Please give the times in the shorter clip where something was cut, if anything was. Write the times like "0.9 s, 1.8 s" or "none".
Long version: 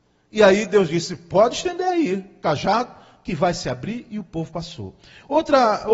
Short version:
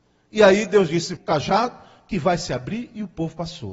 1.2 s